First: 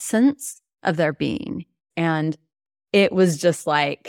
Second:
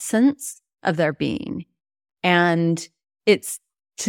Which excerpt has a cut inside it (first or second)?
first